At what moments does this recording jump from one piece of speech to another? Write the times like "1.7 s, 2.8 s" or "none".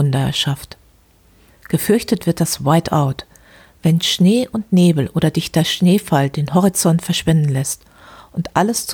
none